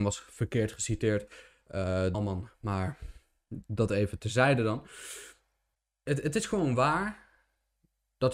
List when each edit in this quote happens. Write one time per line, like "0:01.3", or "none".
0:02.1